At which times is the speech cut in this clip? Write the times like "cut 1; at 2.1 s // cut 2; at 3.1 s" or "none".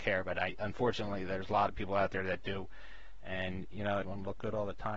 cut 1; at 4.0 s